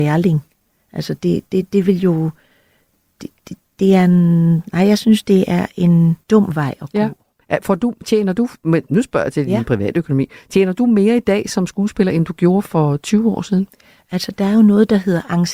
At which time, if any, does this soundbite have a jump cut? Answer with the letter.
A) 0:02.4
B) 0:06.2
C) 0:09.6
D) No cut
B